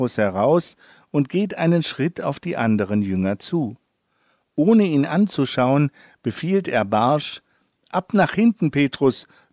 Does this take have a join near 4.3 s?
no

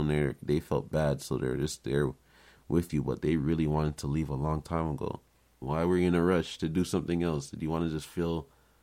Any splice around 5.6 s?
yes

